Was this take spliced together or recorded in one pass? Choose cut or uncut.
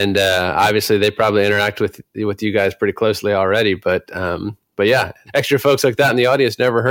uncut